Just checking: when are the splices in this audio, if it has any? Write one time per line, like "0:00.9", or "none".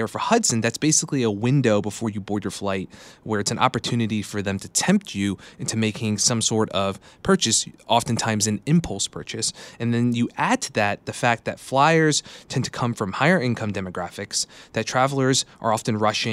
none